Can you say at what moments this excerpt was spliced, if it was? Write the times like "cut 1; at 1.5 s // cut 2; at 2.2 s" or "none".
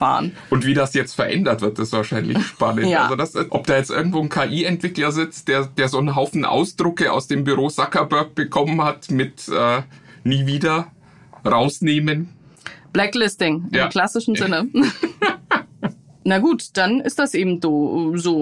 cut 1; at 3.5 s

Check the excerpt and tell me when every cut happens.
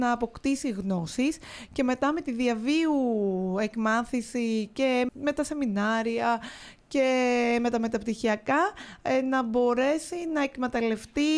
cut 1; at 5.1 s

